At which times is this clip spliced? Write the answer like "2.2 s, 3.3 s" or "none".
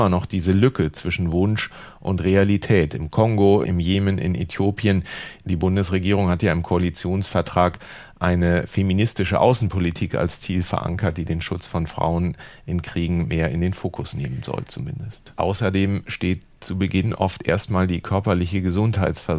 3.6 s, 15.3 s